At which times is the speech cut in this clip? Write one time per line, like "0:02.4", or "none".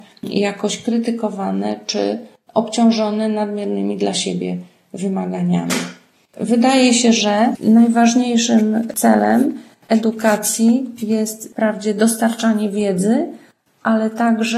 none

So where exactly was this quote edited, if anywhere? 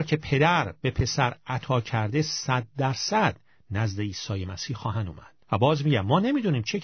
0:05.4

